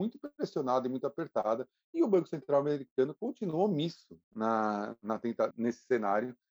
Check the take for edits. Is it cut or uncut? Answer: cut